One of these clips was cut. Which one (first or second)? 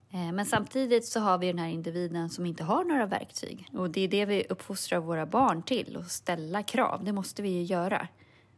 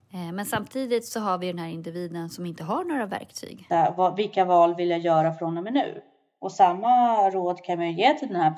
first